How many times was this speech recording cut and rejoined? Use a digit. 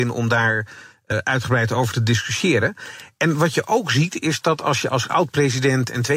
1